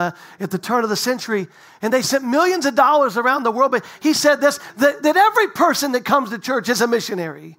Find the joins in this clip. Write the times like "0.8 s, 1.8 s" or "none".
none